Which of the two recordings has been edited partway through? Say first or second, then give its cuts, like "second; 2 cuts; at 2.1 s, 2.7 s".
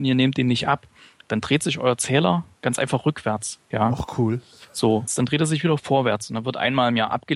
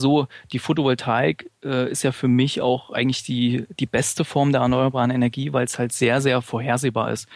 first; 2 cuts; at 3.7 s, 5.1 s